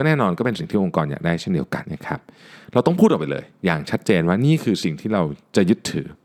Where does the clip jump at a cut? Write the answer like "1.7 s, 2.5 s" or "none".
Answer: 1.8 s